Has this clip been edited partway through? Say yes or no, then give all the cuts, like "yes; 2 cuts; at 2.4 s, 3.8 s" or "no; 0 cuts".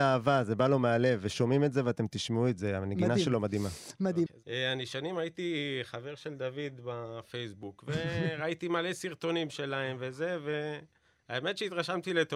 yes; 1 cut; at 4.3 s